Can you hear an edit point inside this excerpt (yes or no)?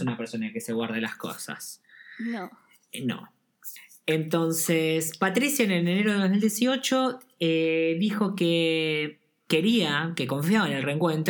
no